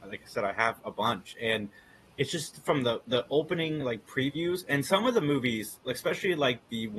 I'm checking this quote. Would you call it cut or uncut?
uncut